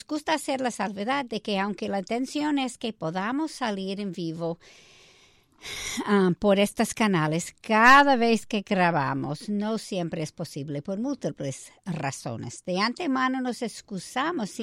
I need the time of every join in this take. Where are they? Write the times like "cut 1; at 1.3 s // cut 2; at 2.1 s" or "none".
none